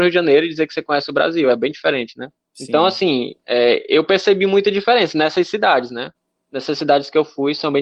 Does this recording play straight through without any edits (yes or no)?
yes